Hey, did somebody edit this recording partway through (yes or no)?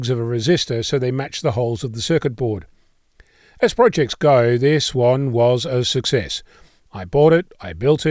no